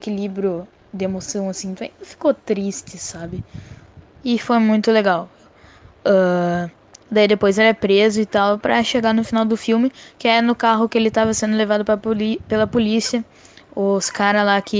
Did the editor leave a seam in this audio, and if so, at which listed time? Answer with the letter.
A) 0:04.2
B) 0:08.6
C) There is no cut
A